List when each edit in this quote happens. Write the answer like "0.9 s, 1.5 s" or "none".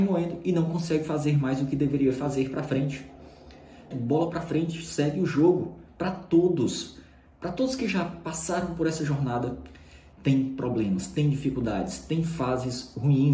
3.9 s, 5.9 s

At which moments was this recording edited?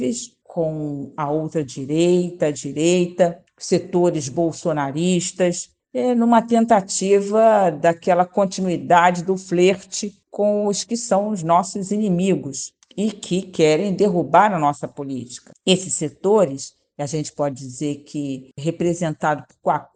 none

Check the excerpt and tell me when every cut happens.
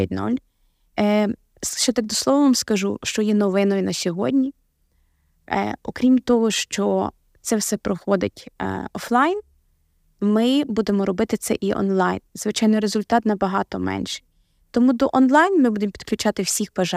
0.9 s

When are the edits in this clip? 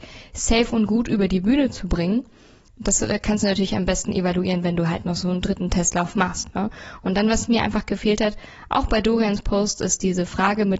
none

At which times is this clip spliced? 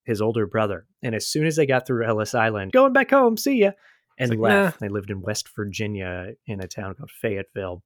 2.7 s, 4.8 s

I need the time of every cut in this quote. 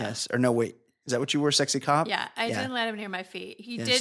none

